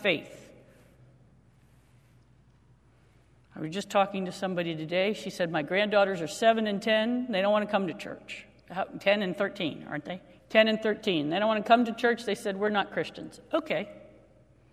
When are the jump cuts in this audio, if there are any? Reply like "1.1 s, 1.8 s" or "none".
10.4 s